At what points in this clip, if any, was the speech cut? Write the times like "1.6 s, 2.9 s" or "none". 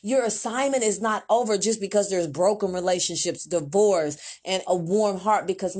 4.6 s